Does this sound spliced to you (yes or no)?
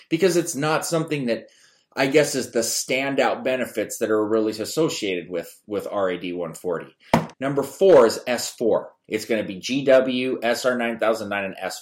yes